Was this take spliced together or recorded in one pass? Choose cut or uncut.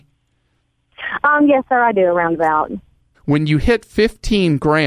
cut